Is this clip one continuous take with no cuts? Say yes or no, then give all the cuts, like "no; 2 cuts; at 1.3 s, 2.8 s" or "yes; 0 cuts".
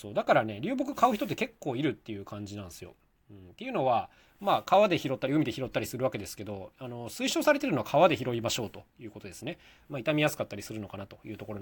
no; 2 cuts; at 3.2 s, 9.9 s